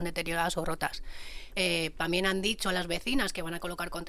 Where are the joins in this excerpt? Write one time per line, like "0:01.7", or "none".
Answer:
0:01.5